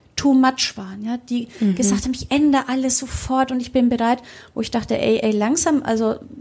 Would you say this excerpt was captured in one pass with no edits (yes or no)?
yes